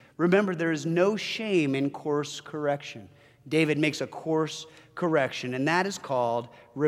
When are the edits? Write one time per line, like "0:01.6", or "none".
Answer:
none